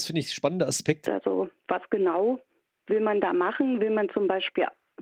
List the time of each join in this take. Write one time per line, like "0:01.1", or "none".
0:01.0